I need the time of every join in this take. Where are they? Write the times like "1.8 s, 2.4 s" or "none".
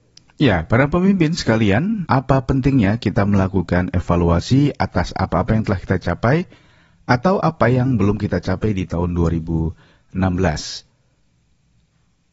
2.1 s